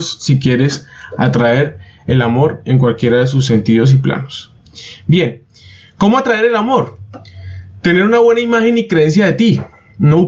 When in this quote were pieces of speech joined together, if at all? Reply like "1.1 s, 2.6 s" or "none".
none